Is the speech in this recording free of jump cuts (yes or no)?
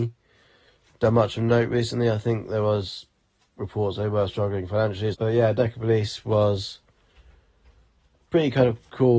no